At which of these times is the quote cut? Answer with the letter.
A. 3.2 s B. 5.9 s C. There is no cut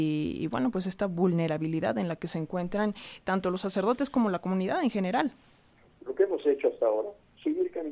B